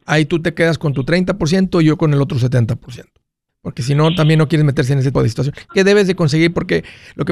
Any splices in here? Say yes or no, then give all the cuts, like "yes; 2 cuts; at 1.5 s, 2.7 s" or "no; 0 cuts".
yes; 2 cuts; at 3.5 s, 5.1 s